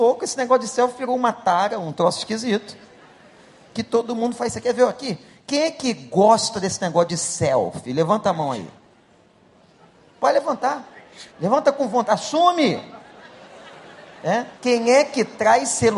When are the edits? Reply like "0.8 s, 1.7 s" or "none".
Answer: 11.3 s, 14.6 s